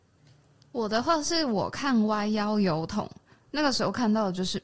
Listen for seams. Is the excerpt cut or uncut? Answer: uncut